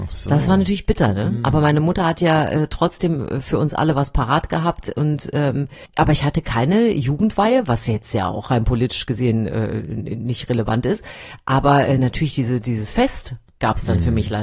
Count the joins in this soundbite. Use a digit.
0